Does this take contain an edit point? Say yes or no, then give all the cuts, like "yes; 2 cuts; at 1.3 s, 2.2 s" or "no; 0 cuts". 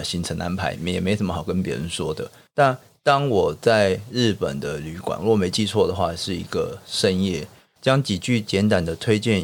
no; 0 cuts